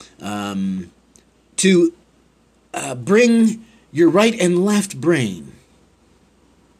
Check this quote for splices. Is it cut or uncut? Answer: uncut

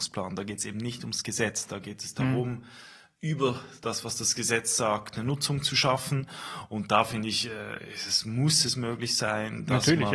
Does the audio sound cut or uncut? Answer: uncut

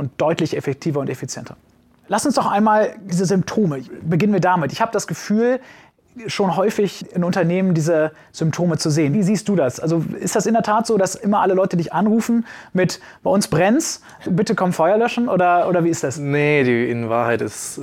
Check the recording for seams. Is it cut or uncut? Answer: uncut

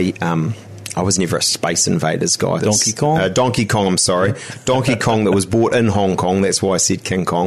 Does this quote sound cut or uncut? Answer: cut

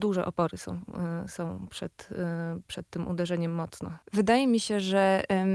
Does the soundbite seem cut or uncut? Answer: cut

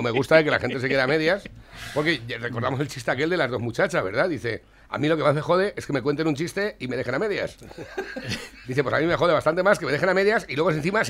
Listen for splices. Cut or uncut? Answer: uncut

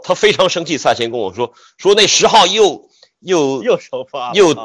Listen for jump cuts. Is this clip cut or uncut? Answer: uncut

